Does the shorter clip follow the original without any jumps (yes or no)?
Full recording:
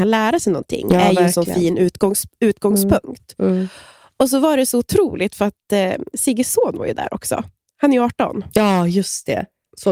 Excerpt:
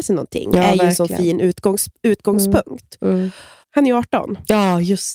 no